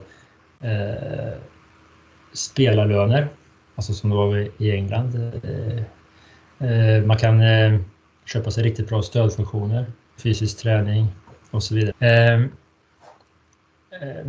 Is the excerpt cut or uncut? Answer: cut